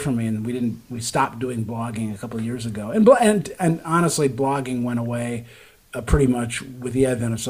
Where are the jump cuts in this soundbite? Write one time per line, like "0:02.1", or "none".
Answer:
none